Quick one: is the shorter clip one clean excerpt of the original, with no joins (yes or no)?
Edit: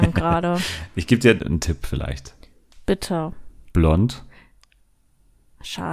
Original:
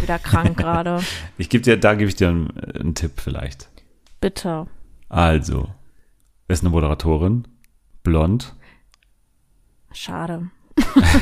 no